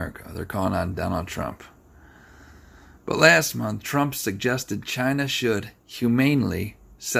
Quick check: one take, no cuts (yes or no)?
yes